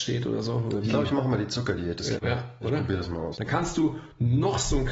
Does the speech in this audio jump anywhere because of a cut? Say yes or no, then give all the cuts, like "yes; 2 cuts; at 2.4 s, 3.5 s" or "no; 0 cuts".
yes; 2 cuts; at 2.2 s, 3.3 s